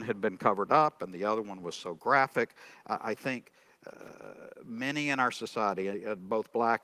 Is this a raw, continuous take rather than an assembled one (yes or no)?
yes